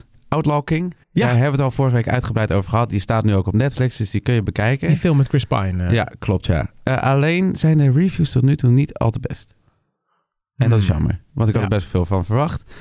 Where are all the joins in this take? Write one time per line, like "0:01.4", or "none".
0:01.0